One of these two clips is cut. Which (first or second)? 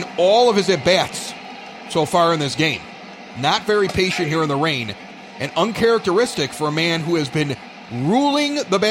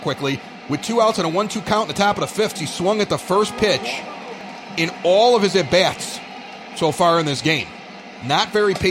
second